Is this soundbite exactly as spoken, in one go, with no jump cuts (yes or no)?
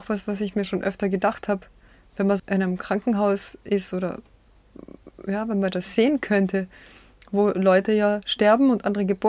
no